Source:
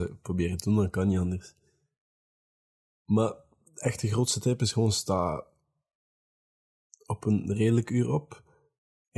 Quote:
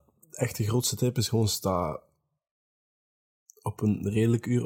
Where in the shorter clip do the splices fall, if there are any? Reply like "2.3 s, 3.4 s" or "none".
none